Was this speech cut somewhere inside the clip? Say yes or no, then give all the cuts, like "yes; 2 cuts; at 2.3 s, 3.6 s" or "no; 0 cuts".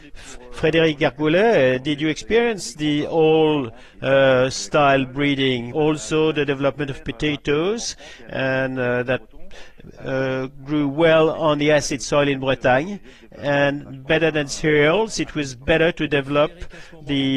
yes; 1 cut; at 5.7 s